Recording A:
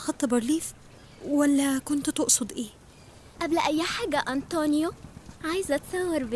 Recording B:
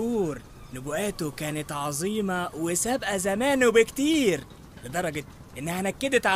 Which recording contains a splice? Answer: A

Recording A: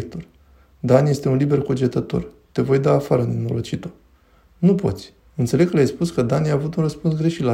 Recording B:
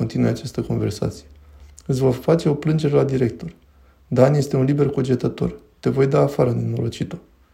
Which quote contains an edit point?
A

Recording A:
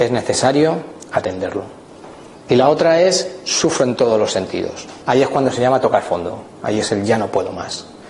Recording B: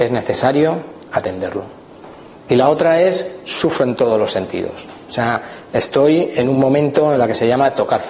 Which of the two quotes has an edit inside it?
A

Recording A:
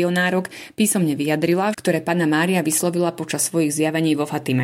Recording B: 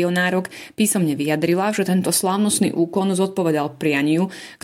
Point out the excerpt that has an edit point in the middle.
A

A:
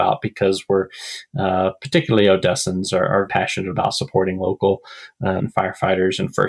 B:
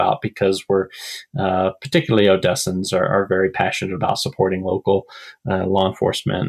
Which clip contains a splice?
A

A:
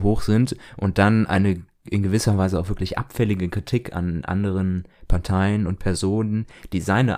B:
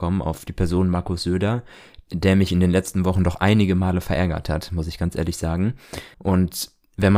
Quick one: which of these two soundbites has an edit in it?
B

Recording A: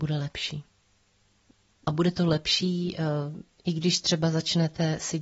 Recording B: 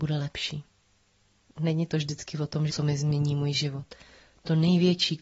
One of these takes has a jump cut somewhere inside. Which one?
B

